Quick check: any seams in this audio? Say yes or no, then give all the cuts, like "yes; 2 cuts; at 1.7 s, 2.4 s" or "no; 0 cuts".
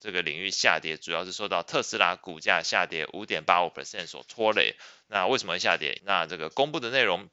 yes; 1 cut; at 6.0 s